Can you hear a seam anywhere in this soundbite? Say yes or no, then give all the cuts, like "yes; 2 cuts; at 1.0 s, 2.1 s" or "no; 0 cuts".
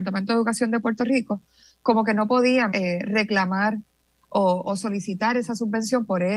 yes; 2 cuts; at 2.7 s, 4.6 s